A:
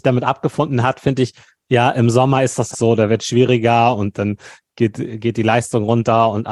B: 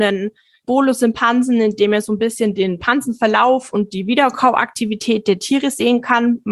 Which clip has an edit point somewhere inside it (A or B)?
A